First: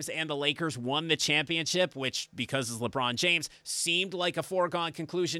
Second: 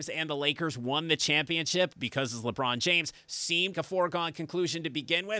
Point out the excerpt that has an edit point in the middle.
second; 2 cuts; at 1.9 s, 3.7 s

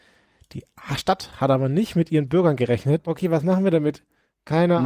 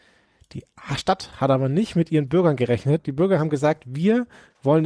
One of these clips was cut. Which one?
first; 1 cut; at 3.0 s

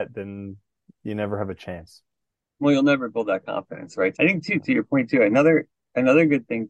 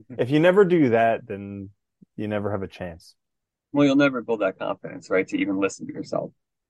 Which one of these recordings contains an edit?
first; 1 cut; at 4.1 s

